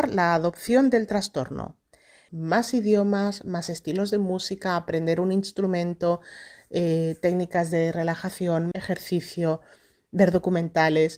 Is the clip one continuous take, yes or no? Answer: no